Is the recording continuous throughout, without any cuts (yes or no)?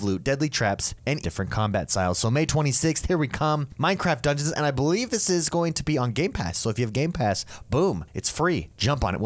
no